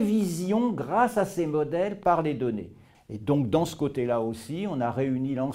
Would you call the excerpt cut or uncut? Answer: cut